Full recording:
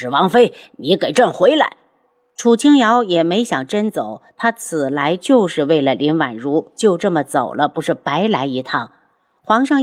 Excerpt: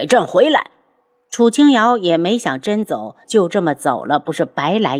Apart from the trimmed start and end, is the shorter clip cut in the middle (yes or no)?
yes